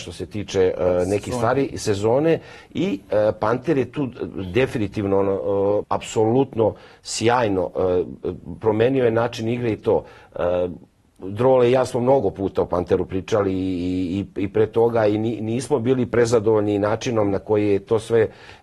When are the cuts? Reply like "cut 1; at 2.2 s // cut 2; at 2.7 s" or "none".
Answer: cut 1; at 5.8 s